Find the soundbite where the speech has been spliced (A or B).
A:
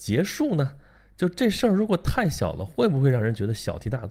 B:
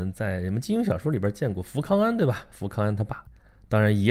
A